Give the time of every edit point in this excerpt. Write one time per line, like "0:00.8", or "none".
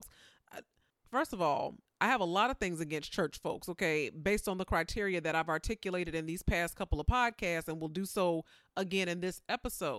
none